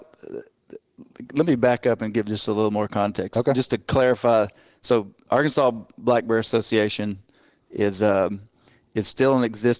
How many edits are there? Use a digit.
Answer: 0